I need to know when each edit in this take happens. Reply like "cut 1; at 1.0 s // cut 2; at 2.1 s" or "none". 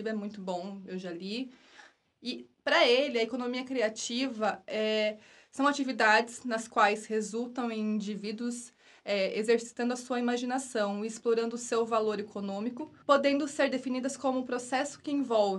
cut 1; at 2.0 s // cut 2; at 13.0 s